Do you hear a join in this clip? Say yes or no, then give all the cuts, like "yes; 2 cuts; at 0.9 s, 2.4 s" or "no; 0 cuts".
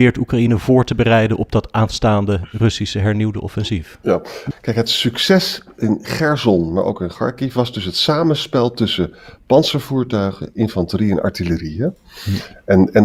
yes; 1 cut; at 4.5 s